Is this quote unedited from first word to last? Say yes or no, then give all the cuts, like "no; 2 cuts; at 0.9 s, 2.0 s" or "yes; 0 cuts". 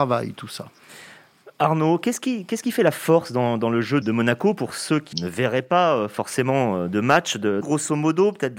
no; 3 cuts; at 4.0 s, 5.1 s, 7.6 s